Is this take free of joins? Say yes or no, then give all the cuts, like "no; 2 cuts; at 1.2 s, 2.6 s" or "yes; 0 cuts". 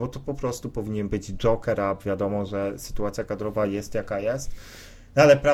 yes; 0 cuts